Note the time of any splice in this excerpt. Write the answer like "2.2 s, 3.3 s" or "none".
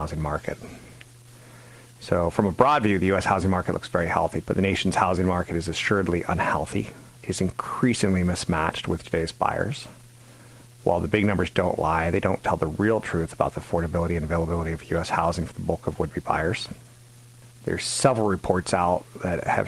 4.4 s, 7.2 s

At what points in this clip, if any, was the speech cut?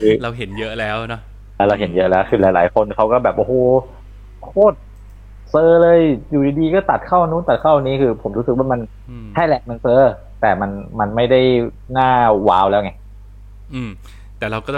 1.6 s

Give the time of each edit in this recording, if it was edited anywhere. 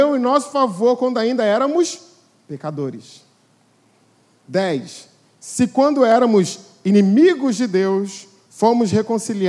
none

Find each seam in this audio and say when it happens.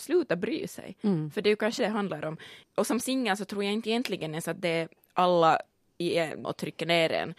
1.8 s, 6.4 s

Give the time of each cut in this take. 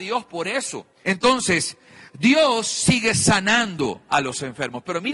1.0 s

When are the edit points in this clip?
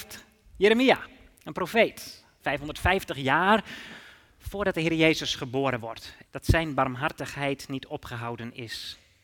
2.4 s, 6.2 s

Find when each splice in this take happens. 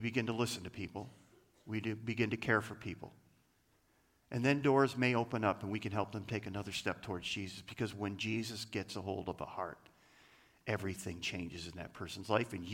none

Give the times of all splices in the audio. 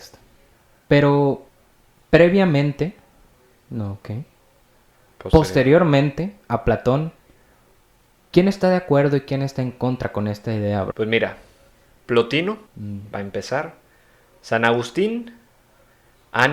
10.9 s, 12.7 s

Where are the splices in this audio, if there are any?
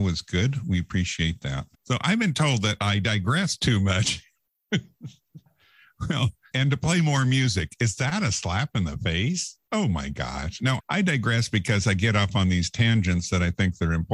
1.7 s, 6.5 s, 10.8 s

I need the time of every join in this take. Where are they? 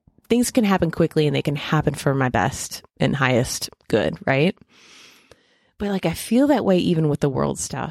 none

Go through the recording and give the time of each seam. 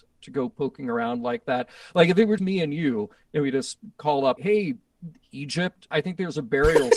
2.4 s, 4.4 s, 5.9 s

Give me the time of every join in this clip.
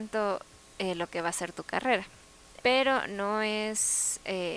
2.6 s

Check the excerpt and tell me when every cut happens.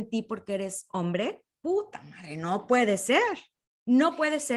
none

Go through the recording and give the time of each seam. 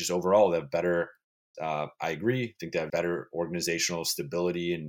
1.5 s, 2.9 s

